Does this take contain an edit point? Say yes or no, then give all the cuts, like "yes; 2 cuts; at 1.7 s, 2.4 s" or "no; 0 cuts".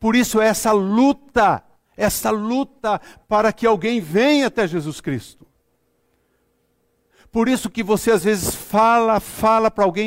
no; 0 cuts